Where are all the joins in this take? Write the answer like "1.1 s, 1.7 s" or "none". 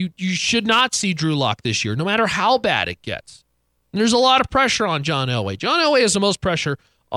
3.8 s